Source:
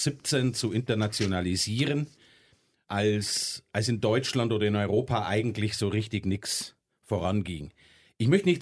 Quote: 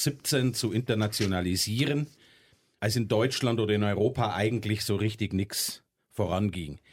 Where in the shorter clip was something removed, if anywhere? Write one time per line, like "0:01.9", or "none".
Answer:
0:02.8